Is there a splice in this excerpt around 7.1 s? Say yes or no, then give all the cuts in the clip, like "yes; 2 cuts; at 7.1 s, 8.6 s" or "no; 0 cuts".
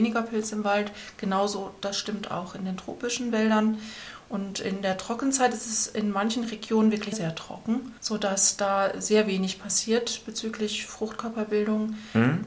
yes; 1 cut; at 7.1 s